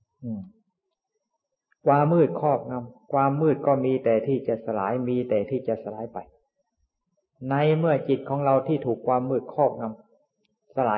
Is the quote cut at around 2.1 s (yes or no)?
yes